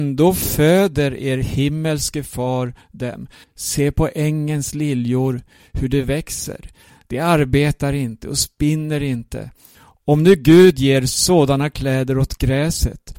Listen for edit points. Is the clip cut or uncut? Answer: cut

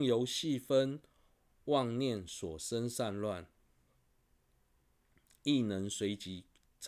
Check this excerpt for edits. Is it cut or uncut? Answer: uncut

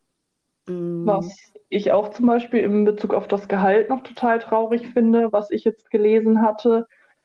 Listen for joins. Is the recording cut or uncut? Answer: uncut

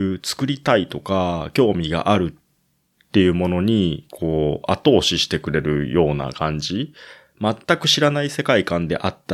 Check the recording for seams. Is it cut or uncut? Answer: uncut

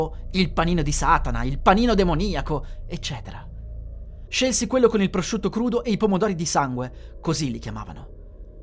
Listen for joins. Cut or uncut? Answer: cut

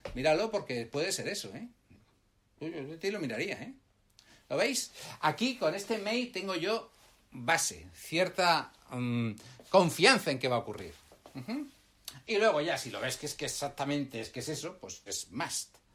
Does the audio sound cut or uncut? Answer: cut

